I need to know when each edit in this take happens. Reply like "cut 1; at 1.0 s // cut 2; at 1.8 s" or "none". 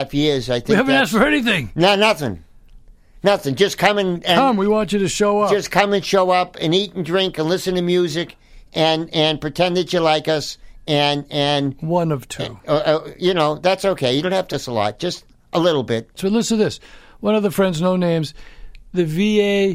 cut 1; at 14.5 s // cut 2; at 16.2 s